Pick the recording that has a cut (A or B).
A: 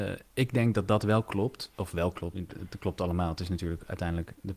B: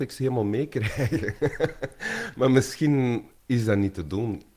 A